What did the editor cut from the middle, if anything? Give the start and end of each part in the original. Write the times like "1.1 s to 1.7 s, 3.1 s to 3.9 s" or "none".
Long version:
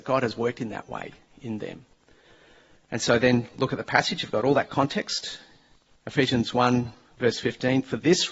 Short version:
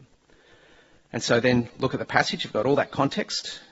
none

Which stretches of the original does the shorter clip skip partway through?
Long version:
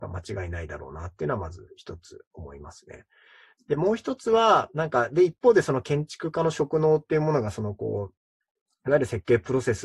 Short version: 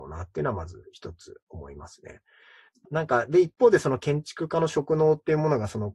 3.7 s to 4.7 s

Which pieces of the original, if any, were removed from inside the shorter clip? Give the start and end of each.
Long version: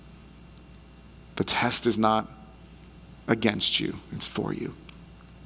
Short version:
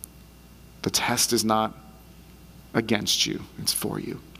none

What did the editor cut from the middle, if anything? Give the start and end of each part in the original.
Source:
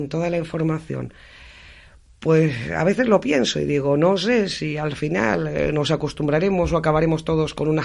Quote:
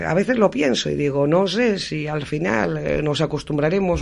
none

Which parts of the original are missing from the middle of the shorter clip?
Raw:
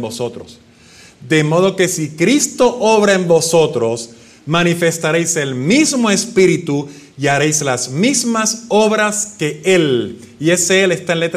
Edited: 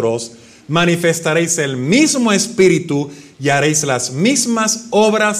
none

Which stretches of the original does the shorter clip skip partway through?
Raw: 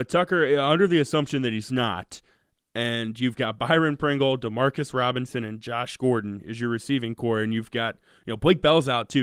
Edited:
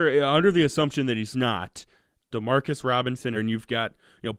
2.7 s to 4.4 s, 5.4 s to 7.4 s

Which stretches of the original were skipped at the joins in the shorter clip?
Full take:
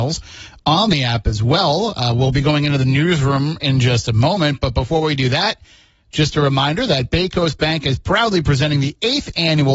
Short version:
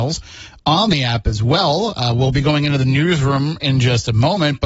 none

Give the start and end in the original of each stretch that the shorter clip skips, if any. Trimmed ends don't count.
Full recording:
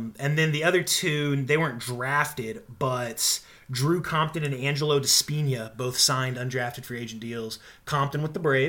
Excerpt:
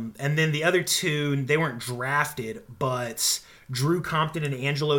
none

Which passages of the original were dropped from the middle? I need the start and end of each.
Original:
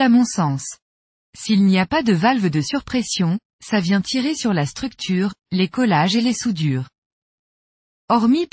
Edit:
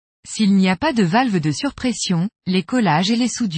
3.5 s to 5.4 s

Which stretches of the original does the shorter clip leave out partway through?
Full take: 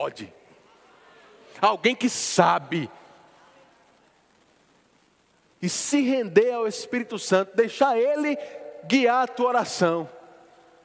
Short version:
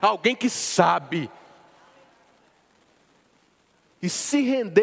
none

